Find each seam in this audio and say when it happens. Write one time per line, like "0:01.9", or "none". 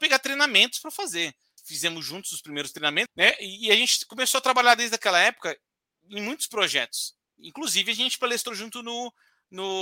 0:01.6
0:03.1